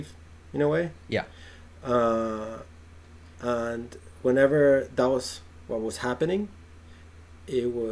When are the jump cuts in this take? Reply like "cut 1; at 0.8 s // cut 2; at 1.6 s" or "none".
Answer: none